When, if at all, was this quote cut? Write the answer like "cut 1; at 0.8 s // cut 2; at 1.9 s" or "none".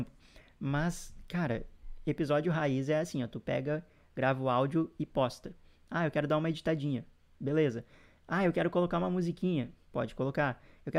none